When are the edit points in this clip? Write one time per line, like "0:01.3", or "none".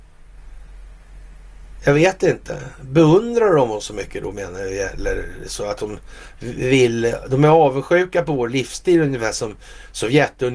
none